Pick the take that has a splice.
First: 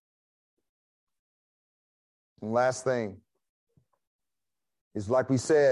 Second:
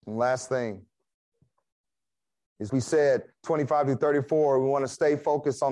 second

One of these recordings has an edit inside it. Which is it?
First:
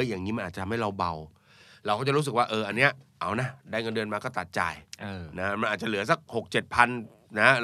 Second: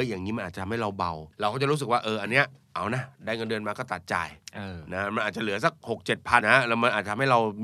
second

